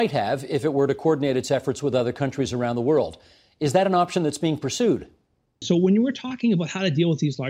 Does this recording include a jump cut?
yes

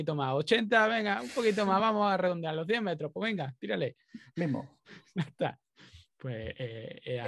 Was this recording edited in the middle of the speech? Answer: no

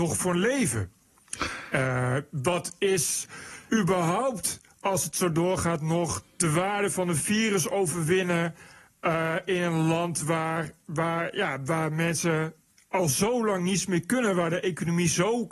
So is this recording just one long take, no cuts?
no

